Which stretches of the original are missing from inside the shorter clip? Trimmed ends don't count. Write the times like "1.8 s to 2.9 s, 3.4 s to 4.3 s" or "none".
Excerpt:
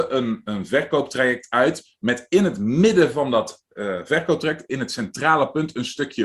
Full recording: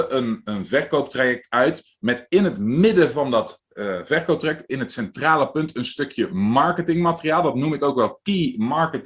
none